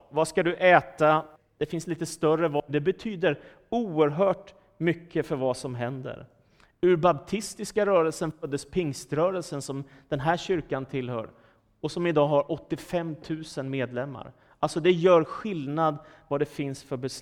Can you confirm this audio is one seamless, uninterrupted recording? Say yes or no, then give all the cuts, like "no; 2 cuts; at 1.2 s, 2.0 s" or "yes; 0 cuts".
no; 1 cut; at 2.7 s